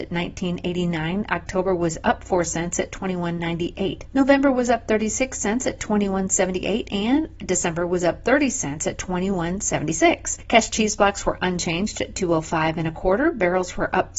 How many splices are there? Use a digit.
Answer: 0